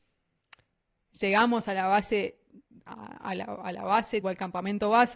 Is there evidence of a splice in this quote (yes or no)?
yes